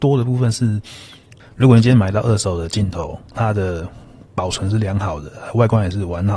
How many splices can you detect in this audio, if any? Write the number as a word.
one